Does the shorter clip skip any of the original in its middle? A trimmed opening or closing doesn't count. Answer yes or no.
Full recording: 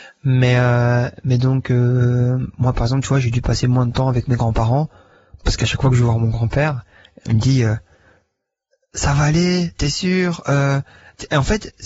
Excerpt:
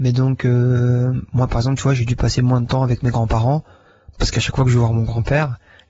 no